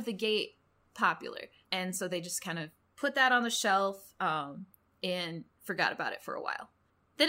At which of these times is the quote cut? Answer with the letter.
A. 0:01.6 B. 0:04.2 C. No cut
A